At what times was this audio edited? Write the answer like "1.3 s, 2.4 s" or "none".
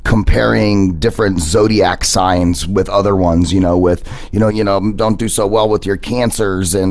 4.5 s